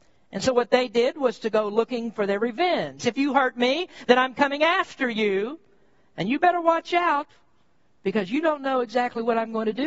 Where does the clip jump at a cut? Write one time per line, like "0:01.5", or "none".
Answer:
0:03.0